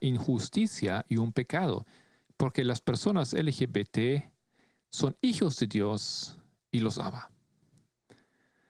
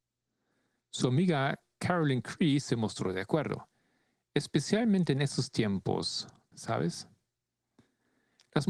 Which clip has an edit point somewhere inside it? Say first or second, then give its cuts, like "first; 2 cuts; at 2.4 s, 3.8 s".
second; 1 cut; at 6.5 s